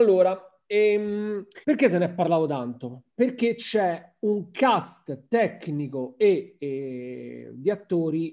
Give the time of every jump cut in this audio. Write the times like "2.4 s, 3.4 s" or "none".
1.6 s

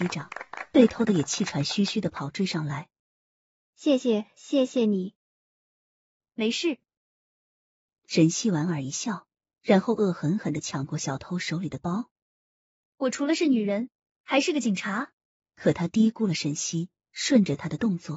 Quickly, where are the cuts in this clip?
15.4 s

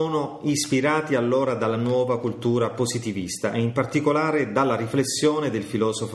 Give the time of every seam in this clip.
none

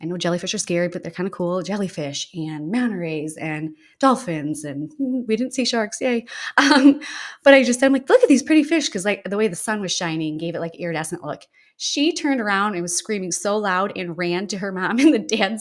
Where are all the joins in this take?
none

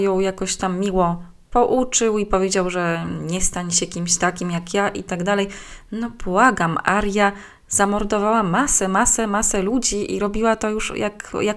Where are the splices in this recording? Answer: none

